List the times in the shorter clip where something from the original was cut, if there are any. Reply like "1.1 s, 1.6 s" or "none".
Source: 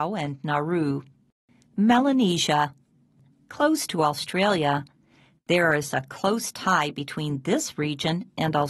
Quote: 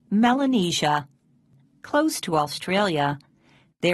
none